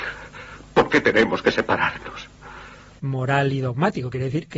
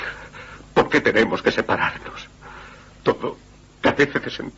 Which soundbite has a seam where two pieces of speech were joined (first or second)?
first